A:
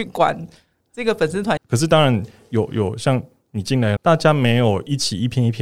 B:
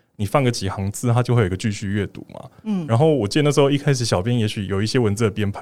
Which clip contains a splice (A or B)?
A